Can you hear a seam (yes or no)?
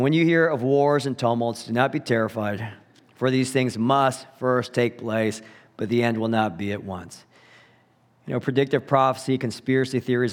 no